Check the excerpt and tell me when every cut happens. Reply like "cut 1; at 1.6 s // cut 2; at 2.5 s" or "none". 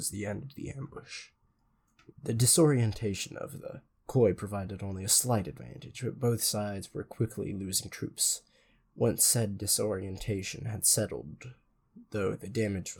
cut 1; at 2.1 s